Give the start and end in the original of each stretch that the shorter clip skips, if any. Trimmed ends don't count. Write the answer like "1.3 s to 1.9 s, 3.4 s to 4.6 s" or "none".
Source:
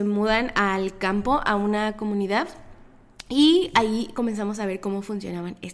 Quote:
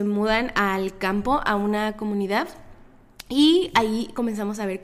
none